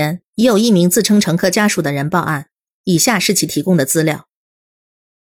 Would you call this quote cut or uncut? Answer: cut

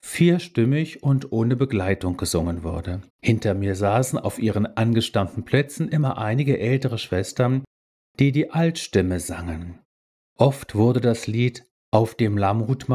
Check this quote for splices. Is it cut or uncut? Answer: cut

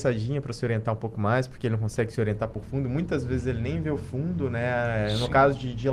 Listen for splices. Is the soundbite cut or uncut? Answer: uncut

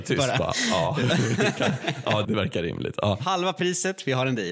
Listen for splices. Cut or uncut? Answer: cut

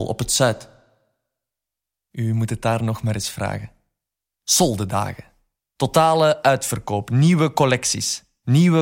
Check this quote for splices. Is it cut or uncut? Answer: uncut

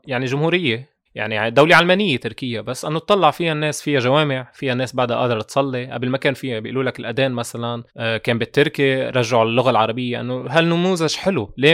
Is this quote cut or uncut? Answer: cut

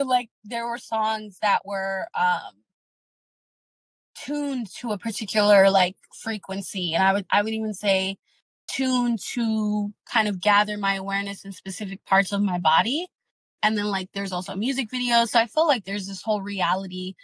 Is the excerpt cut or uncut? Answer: uncut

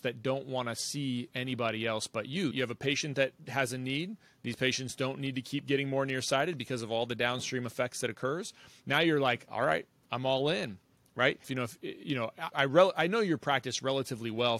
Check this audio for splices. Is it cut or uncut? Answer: cut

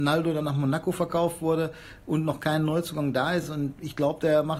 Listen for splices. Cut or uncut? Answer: uncut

